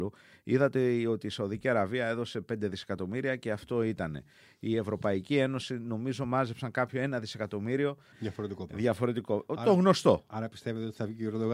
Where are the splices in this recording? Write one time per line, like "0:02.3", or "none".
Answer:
0:08.1